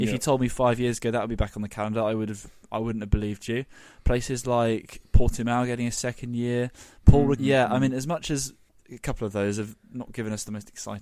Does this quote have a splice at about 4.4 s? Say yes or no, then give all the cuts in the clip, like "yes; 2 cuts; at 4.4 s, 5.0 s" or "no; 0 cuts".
no; 1 cut; at 7.4 s